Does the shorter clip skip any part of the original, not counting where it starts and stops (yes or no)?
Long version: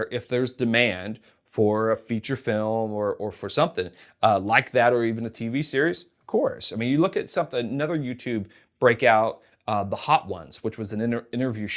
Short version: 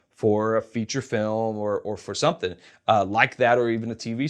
no